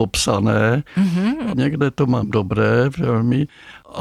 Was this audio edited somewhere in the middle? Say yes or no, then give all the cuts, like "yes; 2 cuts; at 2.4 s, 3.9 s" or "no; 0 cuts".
yes; 1 cut; at 1.5 s